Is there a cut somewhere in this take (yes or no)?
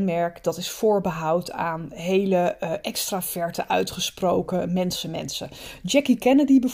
no